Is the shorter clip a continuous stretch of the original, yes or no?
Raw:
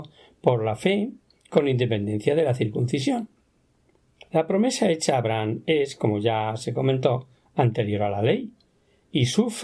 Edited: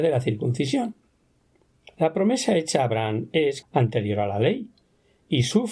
no